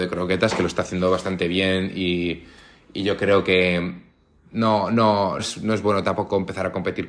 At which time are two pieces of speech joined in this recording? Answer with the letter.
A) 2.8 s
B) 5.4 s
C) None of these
B